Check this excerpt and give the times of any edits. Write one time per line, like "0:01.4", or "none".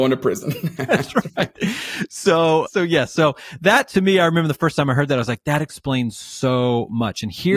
0:02.7